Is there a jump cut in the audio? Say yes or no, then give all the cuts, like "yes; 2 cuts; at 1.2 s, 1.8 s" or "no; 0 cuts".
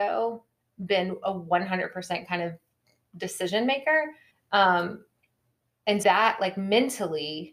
yes; 2 cuts; at 4.3 s, 6.0 s